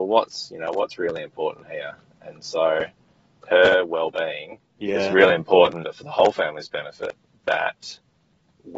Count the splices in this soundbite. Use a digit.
2